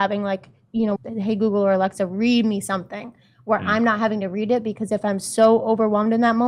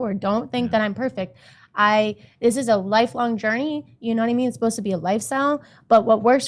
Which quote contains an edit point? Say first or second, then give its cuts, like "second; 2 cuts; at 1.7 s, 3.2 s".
first; 1 cut; at 1.0 s